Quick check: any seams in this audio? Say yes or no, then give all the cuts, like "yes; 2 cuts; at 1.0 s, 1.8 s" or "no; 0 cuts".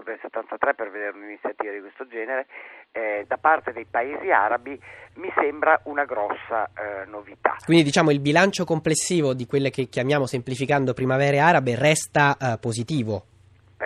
no; 0 cuts